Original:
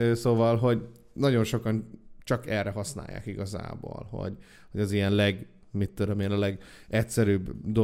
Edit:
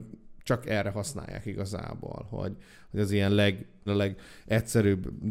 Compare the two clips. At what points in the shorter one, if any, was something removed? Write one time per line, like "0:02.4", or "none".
0:03.9